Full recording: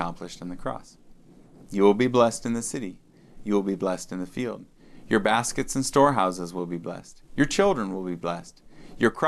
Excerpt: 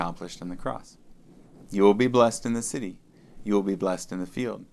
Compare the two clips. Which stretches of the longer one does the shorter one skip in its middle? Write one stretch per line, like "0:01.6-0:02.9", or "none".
none